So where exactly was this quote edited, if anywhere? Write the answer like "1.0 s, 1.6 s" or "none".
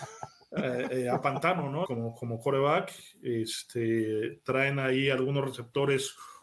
1.8 s

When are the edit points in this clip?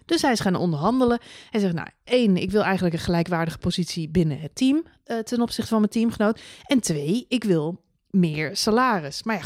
2.0 s

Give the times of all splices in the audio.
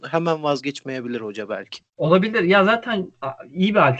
1.9 s

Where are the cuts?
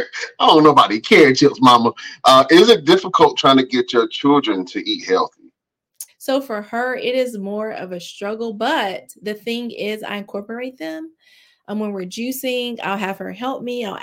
6.1 s

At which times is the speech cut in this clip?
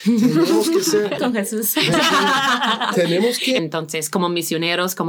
1.2 s, 3.6 s

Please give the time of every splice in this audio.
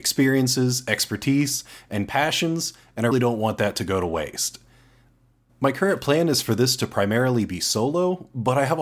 3.1 s, 5.5 s

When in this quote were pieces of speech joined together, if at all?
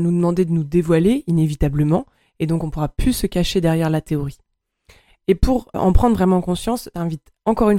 5.7 s

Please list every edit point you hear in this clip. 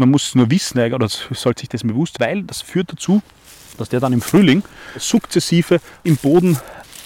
2.2 s

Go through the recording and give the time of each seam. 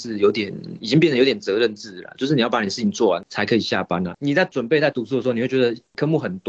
4.1 s

